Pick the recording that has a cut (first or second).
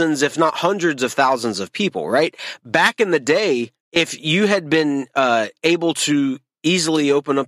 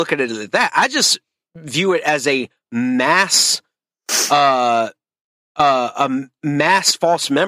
first